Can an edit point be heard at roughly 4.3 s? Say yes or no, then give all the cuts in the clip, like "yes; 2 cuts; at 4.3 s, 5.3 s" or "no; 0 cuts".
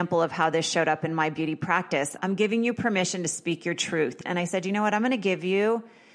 yes; 2 cuts; at 2.2 s, 4.3 s